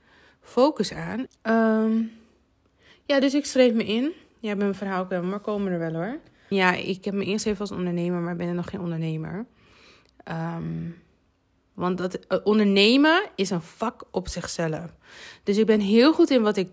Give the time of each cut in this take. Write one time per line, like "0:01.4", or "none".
0:01.3
0:06.5

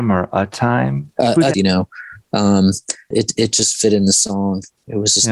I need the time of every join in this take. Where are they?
0:01.5
0:03.1

